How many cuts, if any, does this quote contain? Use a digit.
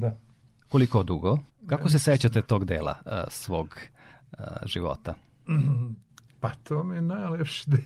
1